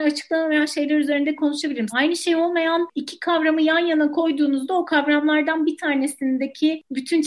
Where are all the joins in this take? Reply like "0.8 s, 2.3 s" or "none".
1.9 s